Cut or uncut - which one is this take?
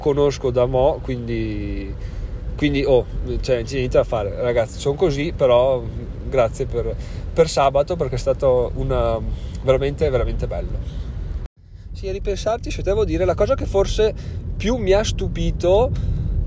uncut